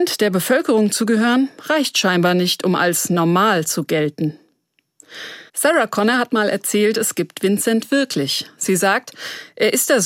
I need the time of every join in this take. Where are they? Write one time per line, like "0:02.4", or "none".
0:05.5